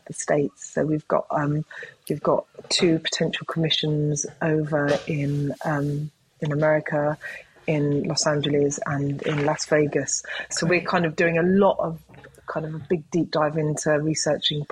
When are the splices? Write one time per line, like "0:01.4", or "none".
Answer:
0:10.5